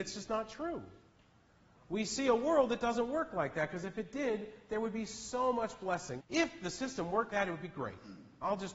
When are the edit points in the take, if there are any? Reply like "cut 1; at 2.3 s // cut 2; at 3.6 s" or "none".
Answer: cut 1; at 6.2 s // cut 2; at 7.3 s